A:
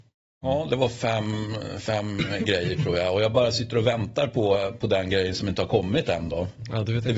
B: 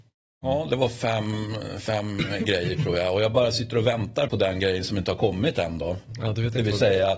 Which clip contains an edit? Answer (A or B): B